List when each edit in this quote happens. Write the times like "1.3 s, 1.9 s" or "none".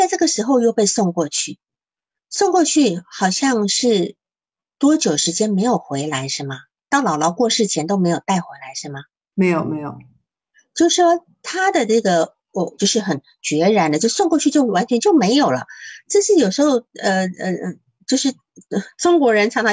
9.3 s, 12.8 s